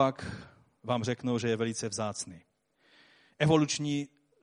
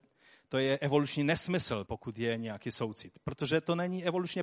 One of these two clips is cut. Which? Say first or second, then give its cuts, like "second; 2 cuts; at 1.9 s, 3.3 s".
second; 1 cut; at 1.9 s